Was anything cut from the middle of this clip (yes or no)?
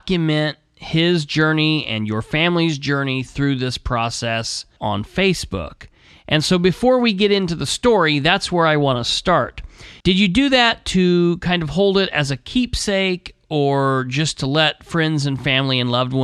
yes